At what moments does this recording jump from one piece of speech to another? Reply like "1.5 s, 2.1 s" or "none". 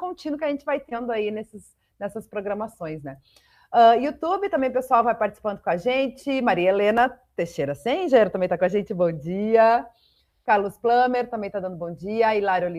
none